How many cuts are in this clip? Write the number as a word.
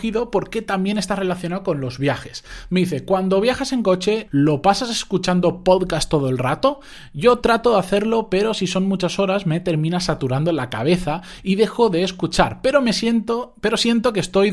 one